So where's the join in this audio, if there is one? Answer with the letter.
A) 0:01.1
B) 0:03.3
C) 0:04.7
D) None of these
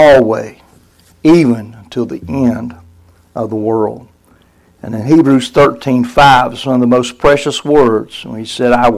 D